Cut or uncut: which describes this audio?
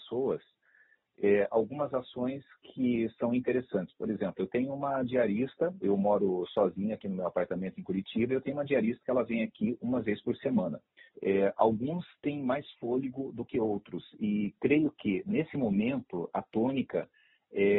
cut